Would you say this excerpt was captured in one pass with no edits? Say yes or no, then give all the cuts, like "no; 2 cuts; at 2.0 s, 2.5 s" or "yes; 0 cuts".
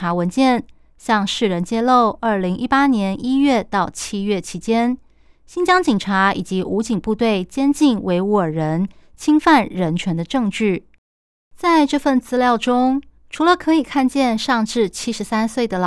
yes; 0 cuts